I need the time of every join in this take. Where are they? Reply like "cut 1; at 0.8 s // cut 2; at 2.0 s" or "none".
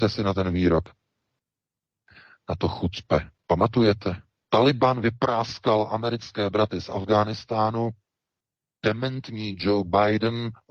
cut 1; at 4.4 s